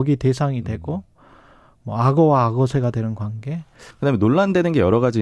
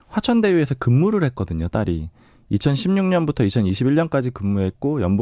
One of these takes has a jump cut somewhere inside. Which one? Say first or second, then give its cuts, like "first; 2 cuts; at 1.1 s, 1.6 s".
first; 1 cut; at 3.9 s